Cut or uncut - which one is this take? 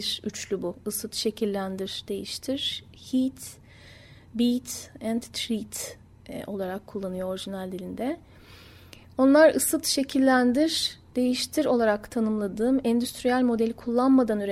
uncut